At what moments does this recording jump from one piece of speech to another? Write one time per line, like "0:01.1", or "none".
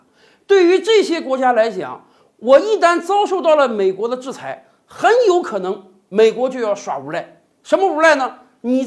none